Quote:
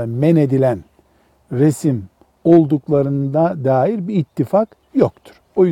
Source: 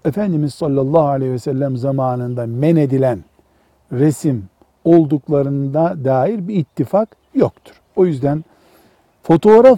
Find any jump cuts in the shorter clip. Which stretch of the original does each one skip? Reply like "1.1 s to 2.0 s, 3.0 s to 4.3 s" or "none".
none